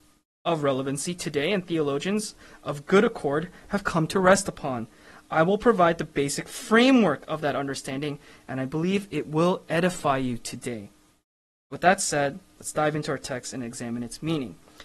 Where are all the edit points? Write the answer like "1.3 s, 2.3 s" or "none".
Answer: none